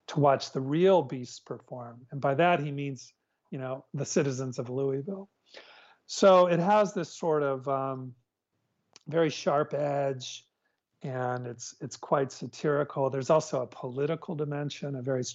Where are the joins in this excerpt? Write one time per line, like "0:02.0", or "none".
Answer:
none